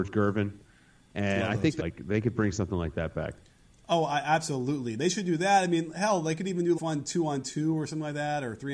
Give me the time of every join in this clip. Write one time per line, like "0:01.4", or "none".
0:01.8
0:06.7